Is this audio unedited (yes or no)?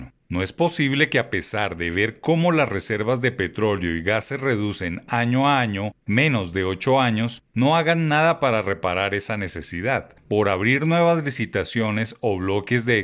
yes